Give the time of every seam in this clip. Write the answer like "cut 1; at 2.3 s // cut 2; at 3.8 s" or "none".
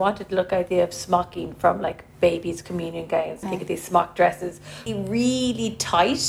cut 1; at 3.4 s // cut 2; at 4.9 s